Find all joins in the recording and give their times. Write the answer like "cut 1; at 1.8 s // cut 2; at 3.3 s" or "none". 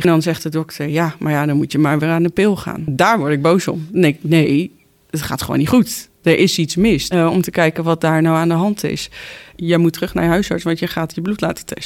cut 1; at 7.1 s // cut 2; at 9.5 s

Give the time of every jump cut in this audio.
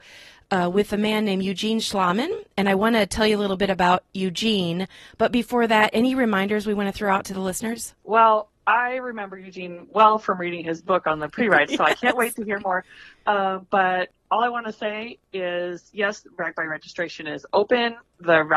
cut 1; at 8.0 s

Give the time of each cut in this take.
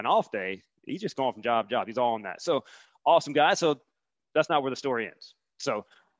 cut 1; at 4.2 s

